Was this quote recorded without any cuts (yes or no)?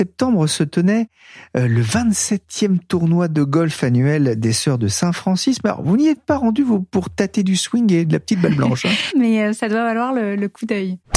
no